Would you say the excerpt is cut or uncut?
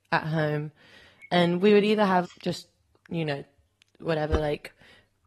cut